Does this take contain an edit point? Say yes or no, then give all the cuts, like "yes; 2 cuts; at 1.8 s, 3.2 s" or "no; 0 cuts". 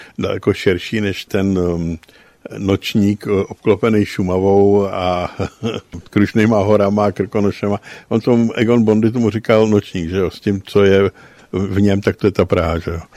no; 0 cuts